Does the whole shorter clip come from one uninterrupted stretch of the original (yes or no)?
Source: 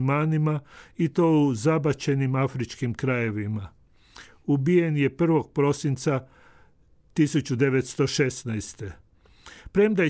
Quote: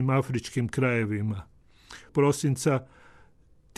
no